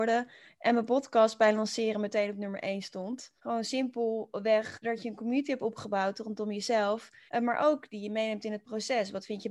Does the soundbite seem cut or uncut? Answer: cut